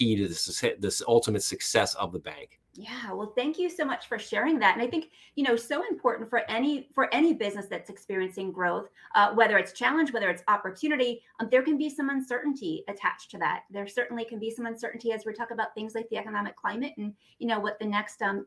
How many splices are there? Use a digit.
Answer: 1